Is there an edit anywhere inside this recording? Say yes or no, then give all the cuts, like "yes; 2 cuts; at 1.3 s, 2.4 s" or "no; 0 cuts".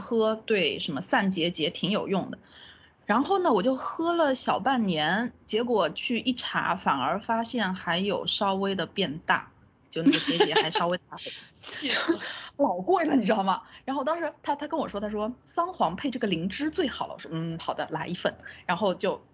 no; 0 cuts